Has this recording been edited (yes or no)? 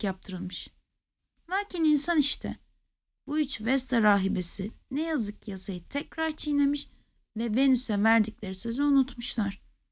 no